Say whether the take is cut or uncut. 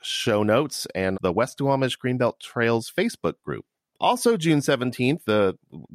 cut